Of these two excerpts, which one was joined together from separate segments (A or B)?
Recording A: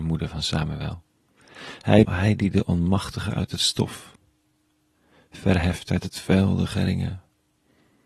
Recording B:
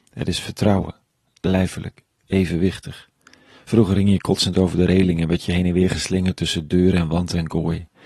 A